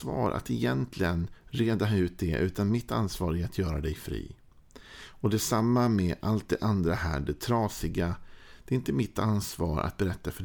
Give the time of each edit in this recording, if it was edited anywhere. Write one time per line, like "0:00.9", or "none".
none

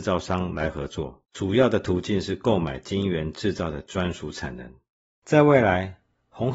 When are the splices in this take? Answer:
0:01.2
0:05.0

